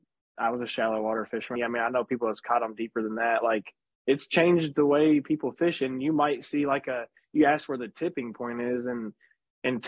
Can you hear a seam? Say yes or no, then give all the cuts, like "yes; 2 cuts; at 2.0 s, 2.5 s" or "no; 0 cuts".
yes; 1 cut; at 1.6 s